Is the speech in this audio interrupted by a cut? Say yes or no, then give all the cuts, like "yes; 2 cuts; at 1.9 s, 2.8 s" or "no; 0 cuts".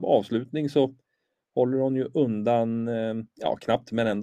no; 0 cuts